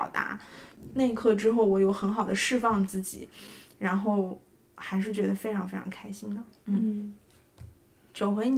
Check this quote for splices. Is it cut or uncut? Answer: uncut